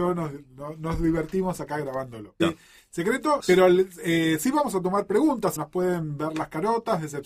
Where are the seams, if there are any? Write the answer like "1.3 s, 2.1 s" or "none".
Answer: 2.4 s, 3.4 s, 5.6 s